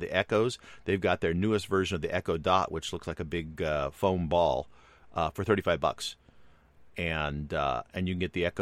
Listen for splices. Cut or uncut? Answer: uncut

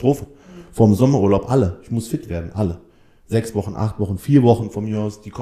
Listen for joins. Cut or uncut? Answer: uncut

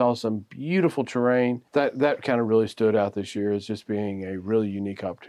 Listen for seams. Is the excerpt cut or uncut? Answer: cut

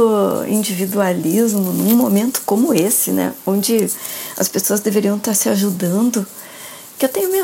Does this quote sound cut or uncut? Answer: uncut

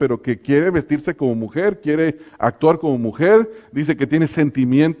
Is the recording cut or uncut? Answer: uncut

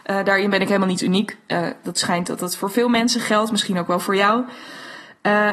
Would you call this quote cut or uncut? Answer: uncut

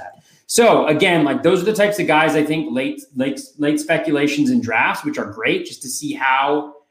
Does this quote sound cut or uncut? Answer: uncut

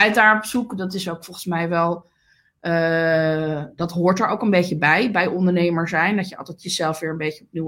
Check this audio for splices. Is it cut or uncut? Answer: uncut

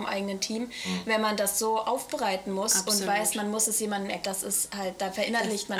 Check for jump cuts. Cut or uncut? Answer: cut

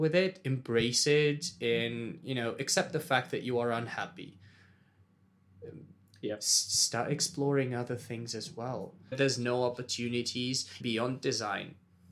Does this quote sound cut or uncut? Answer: cut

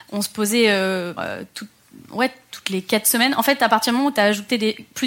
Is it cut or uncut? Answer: cut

